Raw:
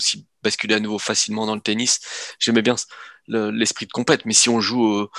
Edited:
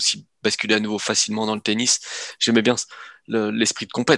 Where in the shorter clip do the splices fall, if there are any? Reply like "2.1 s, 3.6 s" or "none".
none

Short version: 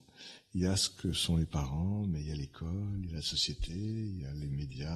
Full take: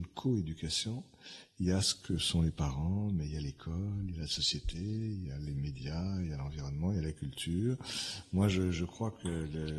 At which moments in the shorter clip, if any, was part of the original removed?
none

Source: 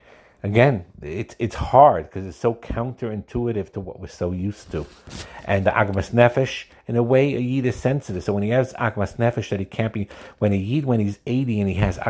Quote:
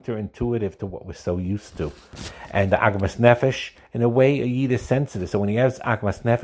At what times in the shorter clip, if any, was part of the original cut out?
none

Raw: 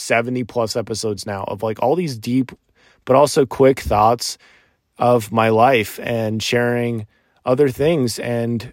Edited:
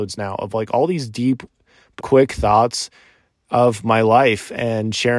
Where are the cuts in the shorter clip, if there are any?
2.0 s

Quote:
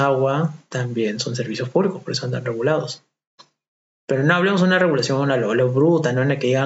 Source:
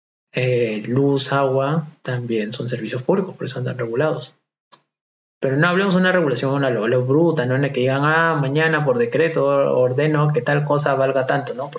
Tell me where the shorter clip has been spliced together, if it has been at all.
none

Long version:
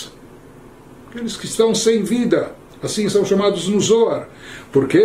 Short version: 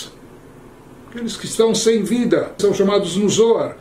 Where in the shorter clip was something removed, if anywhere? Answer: 2.6 s

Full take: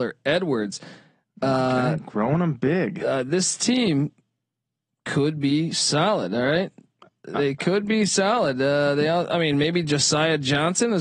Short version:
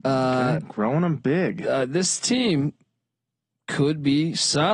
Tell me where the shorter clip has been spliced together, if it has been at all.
none

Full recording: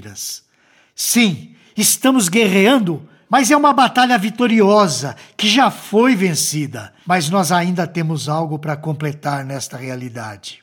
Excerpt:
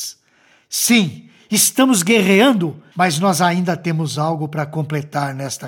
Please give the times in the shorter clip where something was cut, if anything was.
2.9 s

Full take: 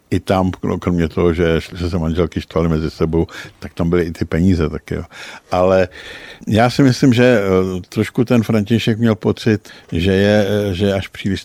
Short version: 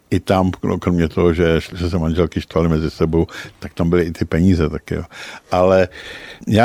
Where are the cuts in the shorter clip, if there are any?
none

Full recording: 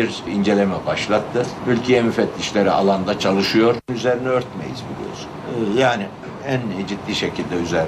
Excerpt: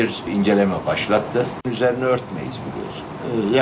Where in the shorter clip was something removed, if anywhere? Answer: 1.6 s

